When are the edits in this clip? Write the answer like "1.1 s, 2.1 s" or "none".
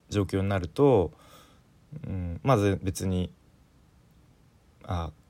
none

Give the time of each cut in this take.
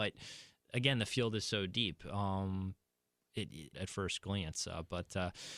3.7 s

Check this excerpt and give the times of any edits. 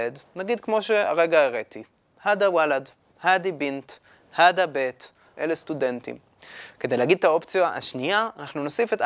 5.3 s

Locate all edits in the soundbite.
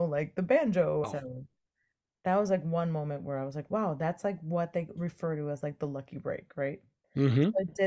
1.0 s

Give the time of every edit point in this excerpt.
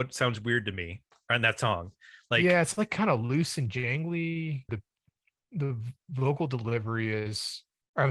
4.7 s

